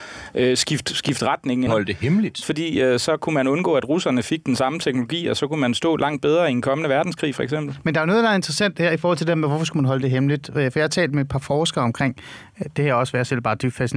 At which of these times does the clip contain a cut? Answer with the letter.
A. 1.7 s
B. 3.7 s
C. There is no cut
A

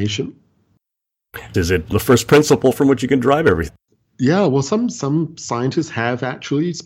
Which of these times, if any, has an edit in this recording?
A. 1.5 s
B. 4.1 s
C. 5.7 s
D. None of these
A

